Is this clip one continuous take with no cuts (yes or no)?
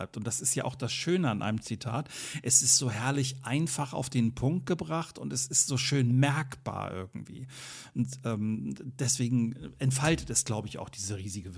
yes